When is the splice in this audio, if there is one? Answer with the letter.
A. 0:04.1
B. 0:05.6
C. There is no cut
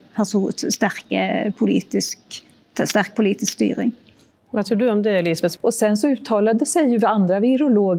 B